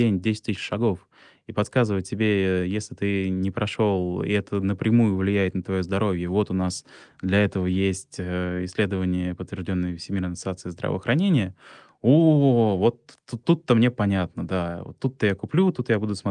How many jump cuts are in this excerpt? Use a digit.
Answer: 0